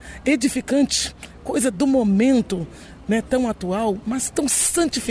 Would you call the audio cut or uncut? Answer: uncut